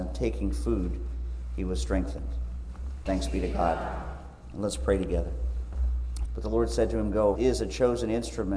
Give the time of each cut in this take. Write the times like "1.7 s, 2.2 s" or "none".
3.1 s, 6.3 s, 7.4 s